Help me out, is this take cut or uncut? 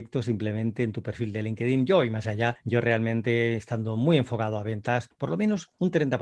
uncut